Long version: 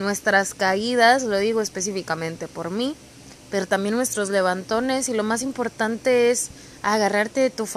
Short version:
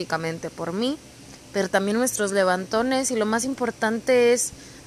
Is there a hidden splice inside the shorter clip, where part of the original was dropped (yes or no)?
no